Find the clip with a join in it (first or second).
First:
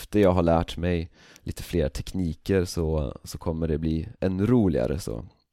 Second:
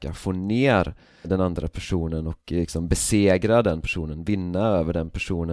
second